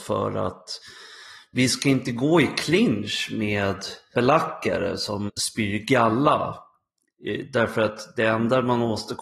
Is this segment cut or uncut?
cut